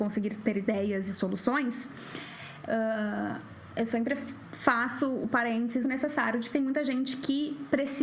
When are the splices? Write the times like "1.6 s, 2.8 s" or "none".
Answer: 2.6 s, 5.8 s